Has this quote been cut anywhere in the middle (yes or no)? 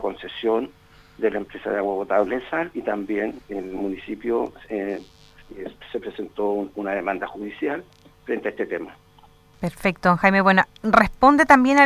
yes